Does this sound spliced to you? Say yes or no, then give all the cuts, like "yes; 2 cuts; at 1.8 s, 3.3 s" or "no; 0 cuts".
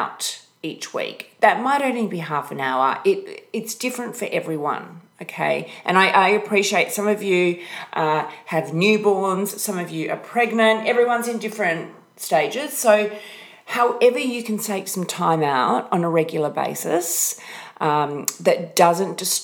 no; 0 cuts